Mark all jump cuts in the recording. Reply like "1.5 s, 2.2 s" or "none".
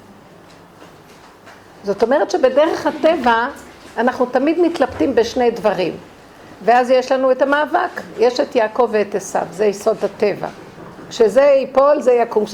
none